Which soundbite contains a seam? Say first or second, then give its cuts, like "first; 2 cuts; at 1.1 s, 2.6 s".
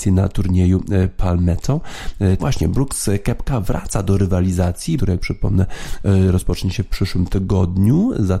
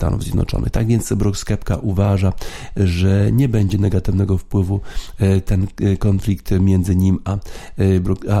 first; 2 cuts; at 2.4 s, 5.0 s